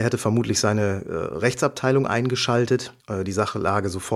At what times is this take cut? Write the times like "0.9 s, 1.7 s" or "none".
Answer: 3.0 s